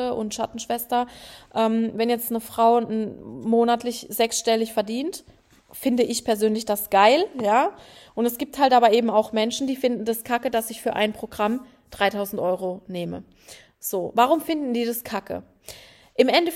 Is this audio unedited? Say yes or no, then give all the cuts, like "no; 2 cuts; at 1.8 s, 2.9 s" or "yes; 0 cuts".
yes; 0 cuts